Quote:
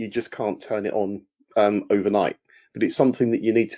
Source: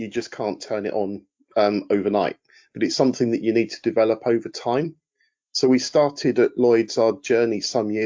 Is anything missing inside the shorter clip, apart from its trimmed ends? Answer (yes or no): no